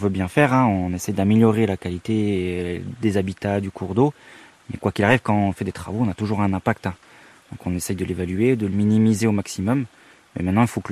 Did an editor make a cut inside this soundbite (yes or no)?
no